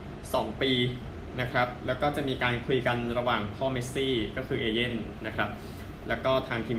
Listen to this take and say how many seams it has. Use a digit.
0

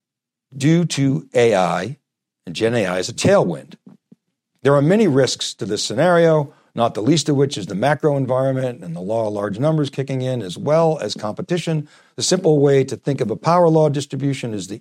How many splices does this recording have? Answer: 1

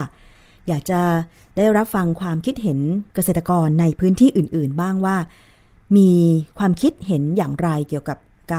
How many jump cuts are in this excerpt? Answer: 1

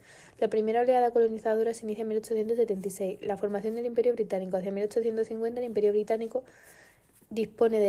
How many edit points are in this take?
0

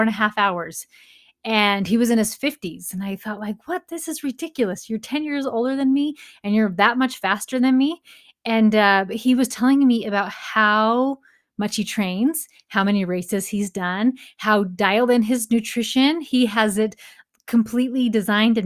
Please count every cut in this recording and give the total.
0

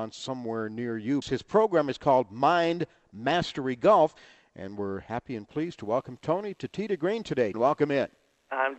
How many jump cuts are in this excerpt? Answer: 2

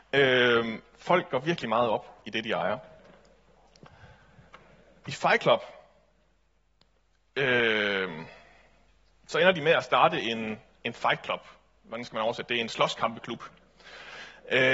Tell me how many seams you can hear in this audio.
0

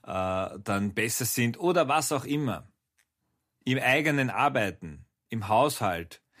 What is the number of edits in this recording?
0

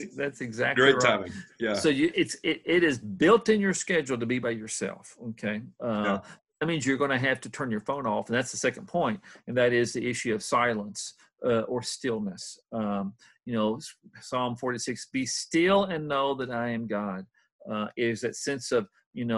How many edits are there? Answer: 0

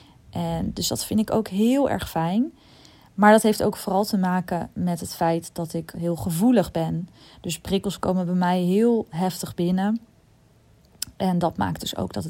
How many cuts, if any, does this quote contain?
1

